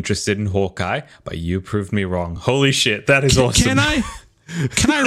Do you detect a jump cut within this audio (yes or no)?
no